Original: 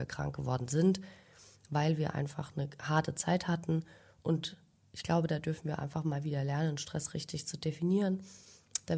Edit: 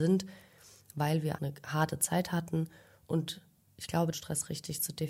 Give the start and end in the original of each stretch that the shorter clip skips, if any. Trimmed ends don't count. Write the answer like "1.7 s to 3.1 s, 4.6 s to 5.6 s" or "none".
2.1 s to 2.5 s, 5.3 s to 6.8 s